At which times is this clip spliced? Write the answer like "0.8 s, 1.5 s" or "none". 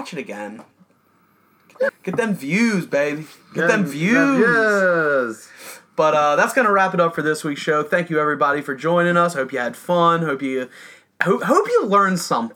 1.9 s